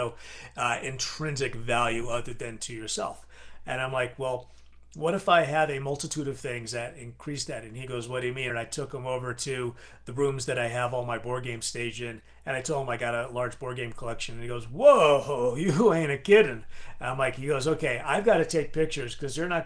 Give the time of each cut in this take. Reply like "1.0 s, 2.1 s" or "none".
8.5 s